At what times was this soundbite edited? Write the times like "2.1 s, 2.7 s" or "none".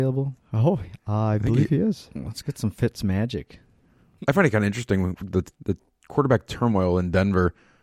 4.2 s, 5.5 s